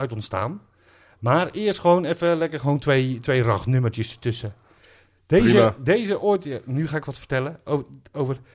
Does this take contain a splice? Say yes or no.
no